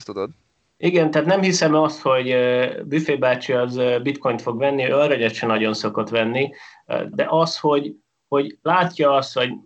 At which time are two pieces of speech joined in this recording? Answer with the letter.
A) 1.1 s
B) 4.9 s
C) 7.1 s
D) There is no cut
C